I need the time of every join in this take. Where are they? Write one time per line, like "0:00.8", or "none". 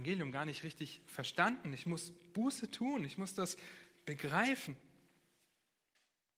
none